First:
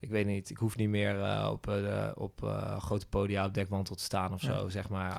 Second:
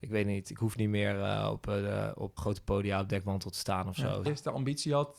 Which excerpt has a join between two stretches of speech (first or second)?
second